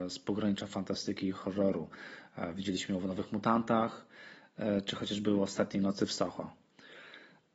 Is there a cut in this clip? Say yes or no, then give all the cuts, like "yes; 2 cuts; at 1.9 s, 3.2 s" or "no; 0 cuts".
no; 0 cuts